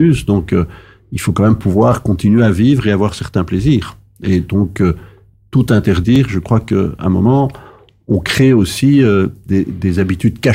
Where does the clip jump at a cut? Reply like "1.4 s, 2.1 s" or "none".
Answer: none